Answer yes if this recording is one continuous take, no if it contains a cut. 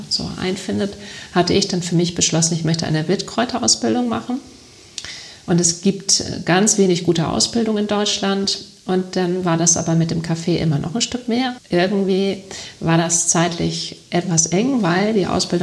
yes